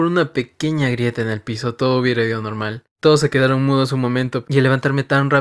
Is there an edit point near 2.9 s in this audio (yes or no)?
yes